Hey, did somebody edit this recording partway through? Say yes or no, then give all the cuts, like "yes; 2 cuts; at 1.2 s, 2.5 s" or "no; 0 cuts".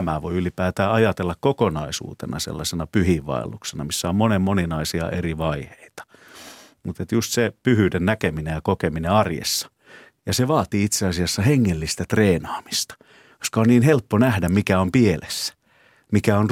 no; 0 cuts